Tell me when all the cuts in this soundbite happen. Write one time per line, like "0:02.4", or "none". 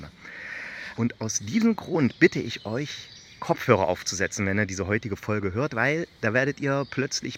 0:01.0